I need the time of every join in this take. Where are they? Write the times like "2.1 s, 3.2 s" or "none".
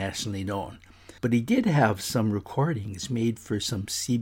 1.2 s